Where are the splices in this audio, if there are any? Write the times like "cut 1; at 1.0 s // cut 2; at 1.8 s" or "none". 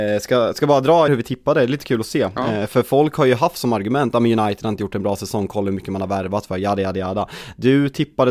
cut 1; at 1.1 s